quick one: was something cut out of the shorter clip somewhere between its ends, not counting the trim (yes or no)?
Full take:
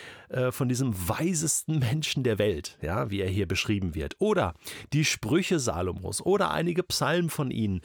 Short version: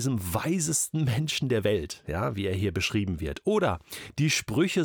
no